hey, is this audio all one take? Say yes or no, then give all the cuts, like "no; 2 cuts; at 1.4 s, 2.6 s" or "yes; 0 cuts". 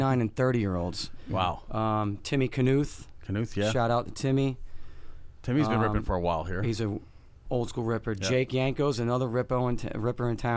yes; 0 cuts